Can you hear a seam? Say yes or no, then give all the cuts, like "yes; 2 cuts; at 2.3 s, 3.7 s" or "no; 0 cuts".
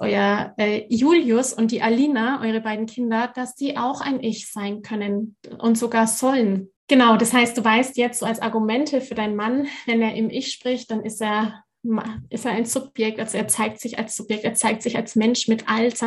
yes; 1 cut; at 6.8 s